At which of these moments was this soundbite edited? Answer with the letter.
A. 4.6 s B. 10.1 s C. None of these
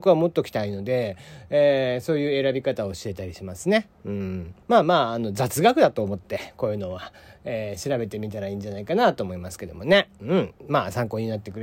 A